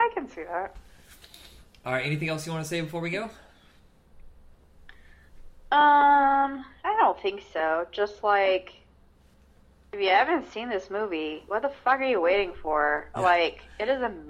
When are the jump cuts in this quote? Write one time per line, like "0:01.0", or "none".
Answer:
none